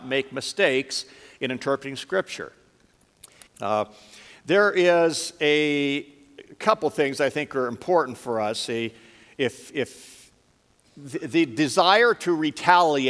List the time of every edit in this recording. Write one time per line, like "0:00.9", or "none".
0:03.5